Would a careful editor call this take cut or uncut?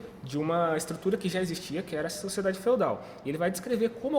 uncut